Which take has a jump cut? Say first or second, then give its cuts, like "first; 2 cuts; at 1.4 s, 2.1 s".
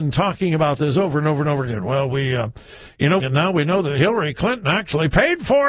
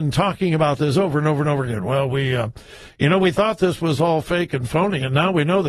first; 1 cut; at 3.2 s